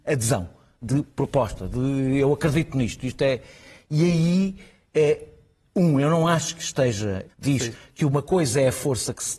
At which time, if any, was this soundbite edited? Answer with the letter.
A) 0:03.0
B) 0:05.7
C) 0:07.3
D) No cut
C